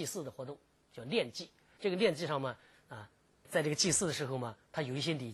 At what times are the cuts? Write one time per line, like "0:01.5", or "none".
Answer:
0:03.4